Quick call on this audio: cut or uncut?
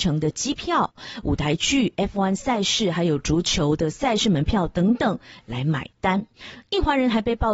uncut